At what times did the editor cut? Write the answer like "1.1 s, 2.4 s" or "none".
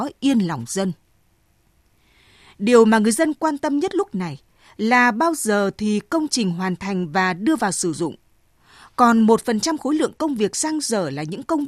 none